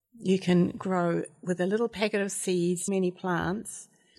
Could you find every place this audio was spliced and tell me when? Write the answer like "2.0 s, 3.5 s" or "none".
2.9 s